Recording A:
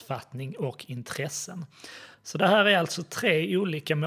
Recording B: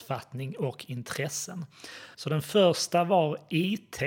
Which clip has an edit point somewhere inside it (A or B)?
B